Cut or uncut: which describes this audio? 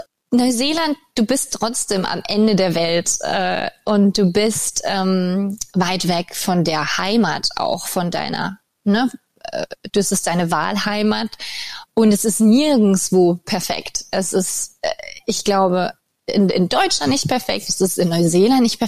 uncut